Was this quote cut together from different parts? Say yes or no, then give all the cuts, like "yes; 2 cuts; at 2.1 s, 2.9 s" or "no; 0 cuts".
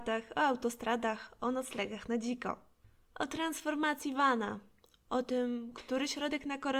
no; 0 cuts